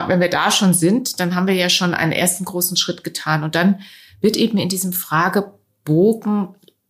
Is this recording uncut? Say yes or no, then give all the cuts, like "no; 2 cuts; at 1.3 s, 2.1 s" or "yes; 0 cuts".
yes; 0 cuts